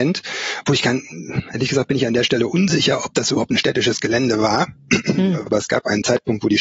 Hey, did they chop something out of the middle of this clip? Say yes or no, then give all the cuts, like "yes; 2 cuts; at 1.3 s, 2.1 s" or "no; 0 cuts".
yes; 1 cut; at 5.5 s